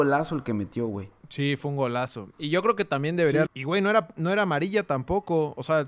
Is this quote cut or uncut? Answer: cut